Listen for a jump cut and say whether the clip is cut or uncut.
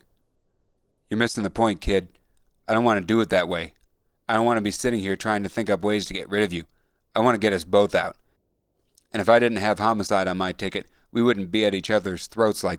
uncut